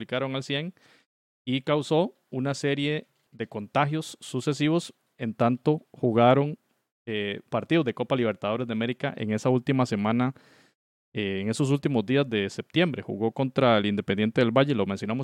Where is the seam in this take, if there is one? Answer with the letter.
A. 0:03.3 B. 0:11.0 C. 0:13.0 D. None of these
A